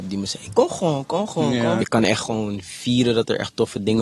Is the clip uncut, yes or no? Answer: no